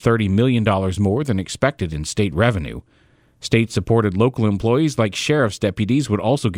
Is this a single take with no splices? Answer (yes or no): yes